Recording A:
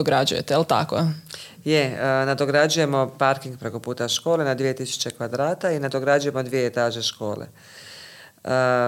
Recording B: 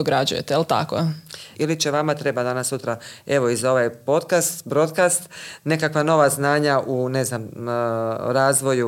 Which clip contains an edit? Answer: B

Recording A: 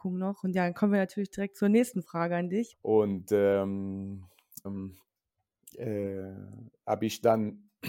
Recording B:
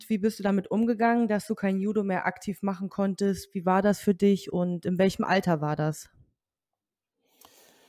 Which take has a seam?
A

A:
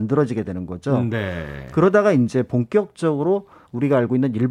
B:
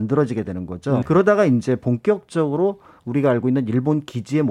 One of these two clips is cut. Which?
B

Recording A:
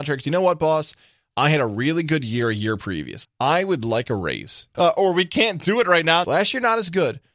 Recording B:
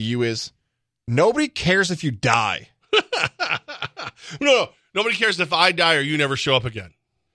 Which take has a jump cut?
A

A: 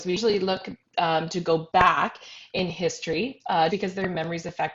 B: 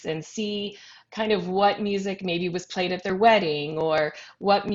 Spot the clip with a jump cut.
A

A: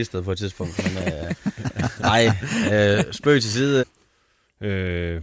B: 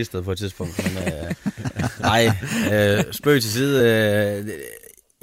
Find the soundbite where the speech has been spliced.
A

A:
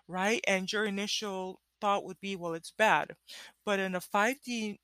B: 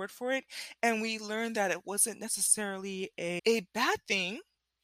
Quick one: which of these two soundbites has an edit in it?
B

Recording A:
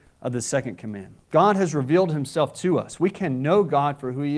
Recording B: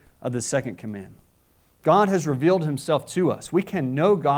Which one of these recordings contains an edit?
A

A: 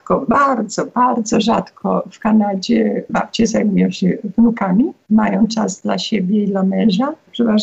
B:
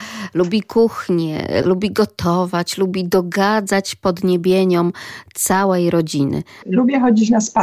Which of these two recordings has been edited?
B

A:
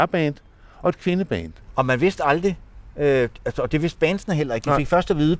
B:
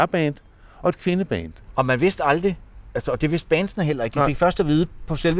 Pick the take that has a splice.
B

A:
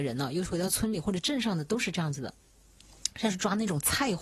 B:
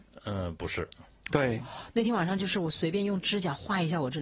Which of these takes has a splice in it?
B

